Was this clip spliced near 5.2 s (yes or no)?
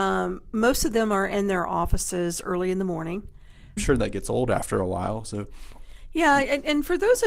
no